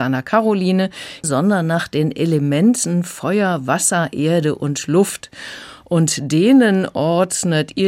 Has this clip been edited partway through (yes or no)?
yes